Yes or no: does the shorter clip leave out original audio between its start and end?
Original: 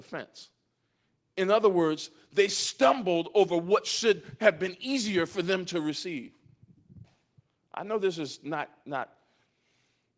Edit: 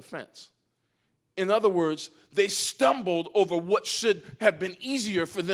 no